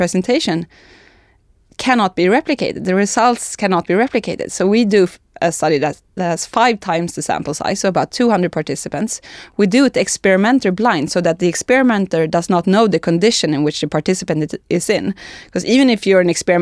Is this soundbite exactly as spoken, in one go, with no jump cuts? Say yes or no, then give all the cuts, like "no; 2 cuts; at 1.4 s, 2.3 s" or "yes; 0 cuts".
yes; 0 cuts